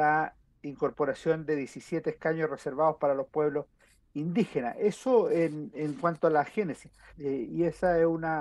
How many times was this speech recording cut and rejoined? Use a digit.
1